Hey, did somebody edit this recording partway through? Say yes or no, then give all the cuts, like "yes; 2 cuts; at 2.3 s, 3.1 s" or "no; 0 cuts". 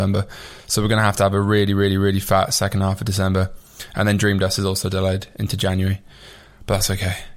no; 0 cuts